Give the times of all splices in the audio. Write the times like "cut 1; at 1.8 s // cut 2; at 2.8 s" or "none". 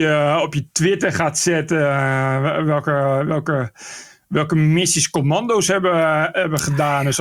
none